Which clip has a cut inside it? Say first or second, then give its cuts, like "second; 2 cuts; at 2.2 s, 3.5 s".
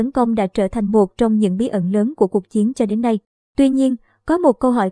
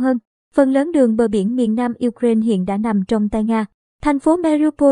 first; 1 cut; at 3.4 s